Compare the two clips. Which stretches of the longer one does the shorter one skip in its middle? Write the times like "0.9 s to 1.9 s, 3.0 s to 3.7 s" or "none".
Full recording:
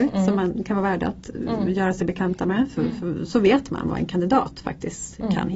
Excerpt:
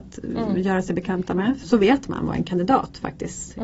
2.7 s to 3.3 s